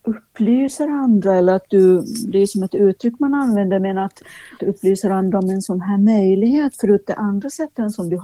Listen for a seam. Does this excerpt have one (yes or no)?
no